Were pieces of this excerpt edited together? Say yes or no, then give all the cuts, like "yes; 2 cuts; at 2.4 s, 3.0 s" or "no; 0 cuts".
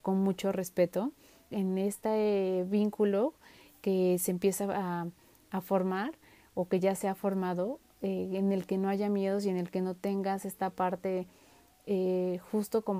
yes; 1 cut; at 1.5 s